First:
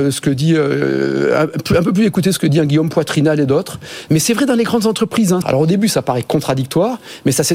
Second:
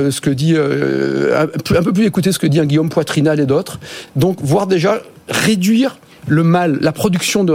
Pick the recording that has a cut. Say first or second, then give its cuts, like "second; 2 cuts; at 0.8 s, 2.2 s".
first; 2 cuts; at 4.1 s, 5.4 s